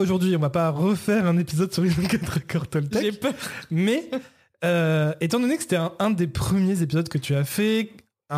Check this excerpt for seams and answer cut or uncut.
uncut